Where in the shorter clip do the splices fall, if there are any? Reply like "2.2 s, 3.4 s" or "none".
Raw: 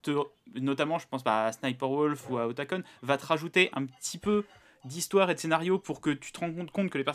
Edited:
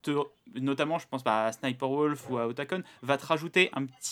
none